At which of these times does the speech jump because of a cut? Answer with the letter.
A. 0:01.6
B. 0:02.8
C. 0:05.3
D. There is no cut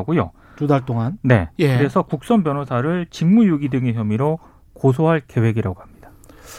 A